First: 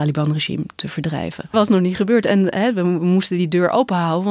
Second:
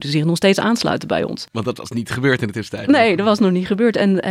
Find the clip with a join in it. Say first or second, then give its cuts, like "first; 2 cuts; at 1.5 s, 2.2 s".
first; 1 cut; at 1.5 s